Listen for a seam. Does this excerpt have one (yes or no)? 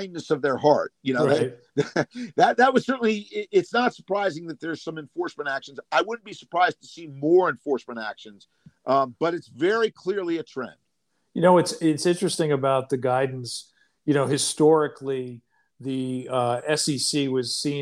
no